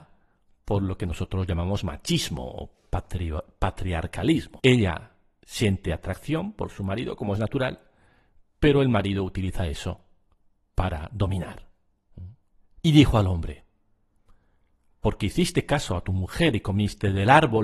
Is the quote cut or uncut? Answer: cut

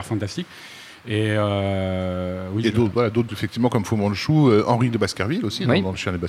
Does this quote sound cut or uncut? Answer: cut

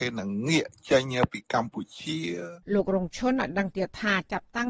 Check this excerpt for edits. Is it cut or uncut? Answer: cut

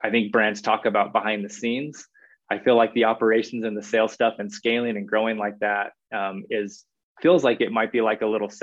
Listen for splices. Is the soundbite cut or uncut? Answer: uncut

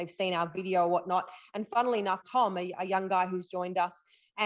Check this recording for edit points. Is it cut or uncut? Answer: cut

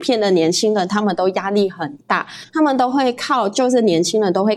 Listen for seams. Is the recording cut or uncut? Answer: cut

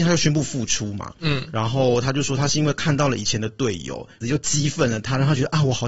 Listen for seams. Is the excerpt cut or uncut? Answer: cut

